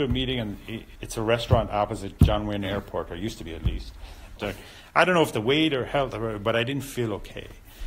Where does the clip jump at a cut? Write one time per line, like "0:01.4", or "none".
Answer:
0:01.0
0:04.4